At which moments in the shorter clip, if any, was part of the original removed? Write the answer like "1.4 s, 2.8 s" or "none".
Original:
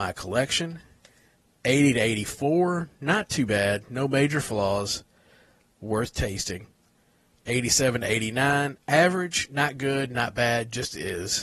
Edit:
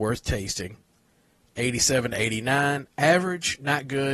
none